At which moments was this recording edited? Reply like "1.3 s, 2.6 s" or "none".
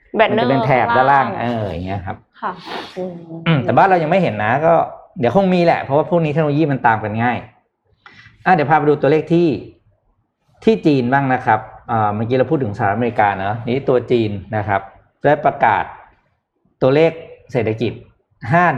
none